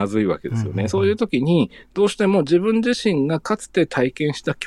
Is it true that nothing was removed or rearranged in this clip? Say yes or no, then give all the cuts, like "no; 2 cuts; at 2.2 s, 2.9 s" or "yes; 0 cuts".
yes; 0 cuts